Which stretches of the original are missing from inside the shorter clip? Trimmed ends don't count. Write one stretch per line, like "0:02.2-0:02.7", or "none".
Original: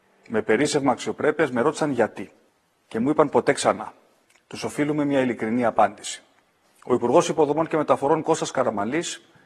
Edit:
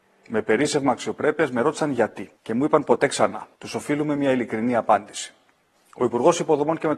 0:02.3-0:02.8
0:04.0-0:04.4